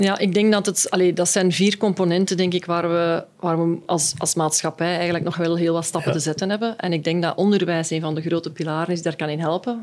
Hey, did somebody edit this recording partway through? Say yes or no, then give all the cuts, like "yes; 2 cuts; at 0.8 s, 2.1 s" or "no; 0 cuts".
no; 0 cuts